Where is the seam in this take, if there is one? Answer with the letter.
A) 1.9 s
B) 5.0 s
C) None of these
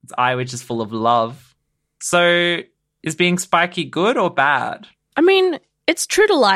C